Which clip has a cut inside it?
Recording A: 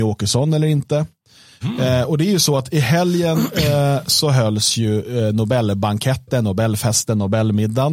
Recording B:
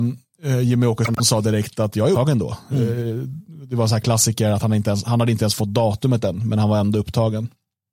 A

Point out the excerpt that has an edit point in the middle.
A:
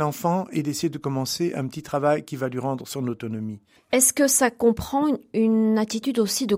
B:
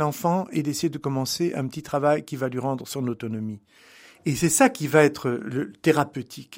A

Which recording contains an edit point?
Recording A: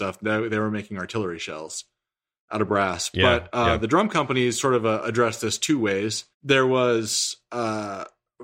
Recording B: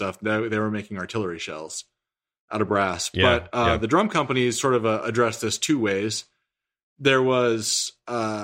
A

